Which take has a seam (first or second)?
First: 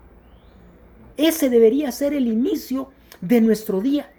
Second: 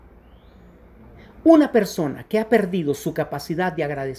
first